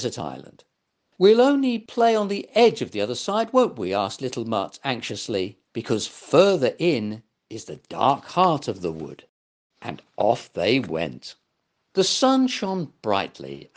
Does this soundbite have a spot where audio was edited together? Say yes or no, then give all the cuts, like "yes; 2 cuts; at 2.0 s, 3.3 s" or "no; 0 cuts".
yes; 1 cut; at 9.7 s